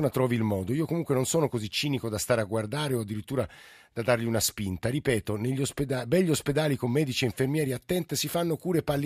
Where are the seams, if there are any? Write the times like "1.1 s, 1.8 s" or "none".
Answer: none